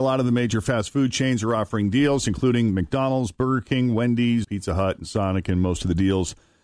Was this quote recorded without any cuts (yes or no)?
no